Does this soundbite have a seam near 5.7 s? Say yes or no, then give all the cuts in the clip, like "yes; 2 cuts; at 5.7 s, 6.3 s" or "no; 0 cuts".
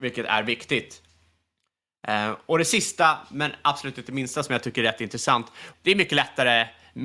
yes; 1 cut; at 5.7 s